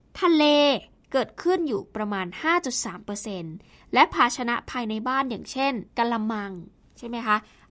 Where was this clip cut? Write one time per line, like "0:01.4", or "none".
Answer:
0:05.9